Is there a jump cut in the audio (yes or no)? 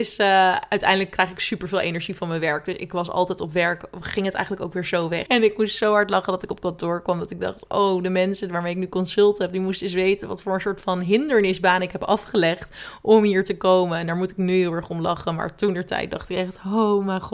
yes